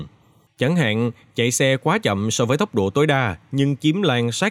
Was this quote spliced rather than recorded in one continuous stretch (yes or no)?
no